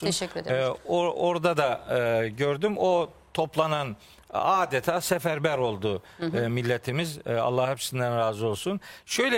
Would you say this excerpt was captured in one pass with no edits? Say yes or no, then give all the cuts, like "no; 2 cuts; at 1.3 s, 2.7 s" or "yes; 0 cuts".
yes; 0 cuts